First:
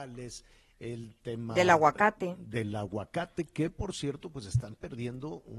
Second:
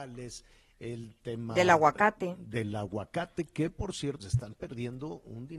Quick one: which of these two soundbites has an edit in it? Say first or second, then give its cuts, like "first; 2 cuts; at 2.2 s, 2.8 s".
second; 1 cut; at 4.2 s